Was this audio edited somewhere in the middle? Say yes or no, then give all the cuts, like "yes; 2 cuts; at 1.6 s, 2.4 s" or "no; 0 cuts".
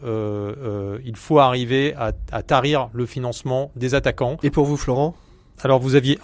yes; 1 cut; at 4.4 s